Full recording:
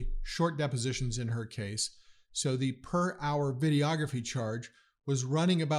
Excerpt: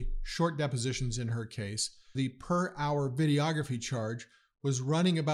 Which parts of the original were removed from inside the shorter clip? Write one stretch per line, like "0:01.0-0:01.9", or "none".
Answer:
0:02.1-0:02.6